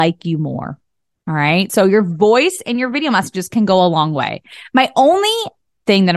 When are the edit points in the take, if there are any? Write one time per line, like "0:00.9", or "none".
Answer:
none